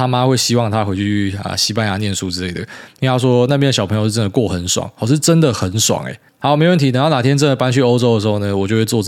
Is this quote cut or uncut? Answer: cut